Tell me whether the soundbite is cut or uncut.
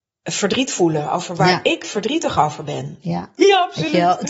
cut